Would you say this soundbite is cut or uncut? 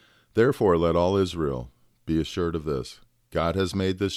uncut